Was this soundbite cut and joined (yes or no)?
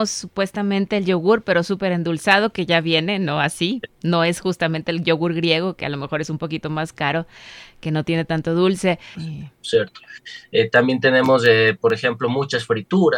yes